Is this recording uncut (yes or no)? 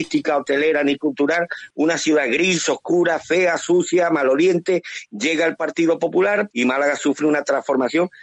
no